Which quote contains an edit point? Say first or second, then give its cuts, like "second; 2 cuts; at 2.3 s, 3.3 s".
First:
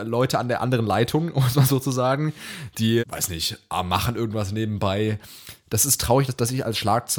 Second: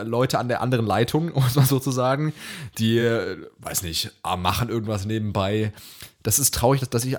first; 1 cut; at 3.0 s